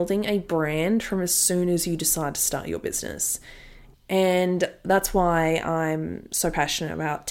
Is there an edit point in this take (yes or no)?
yes